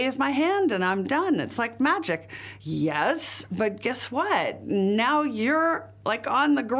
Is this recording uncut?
yes; 0 cuts

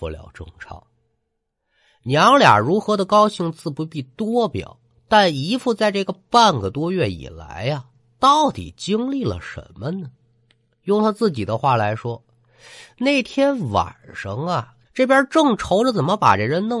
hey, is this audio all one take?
no; 1 cut; at 14.8 s

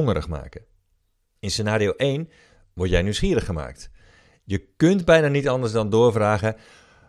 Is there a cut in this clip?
yes; 1 cut; at 1.4 s

